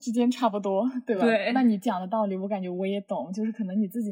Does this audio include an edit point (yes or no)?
no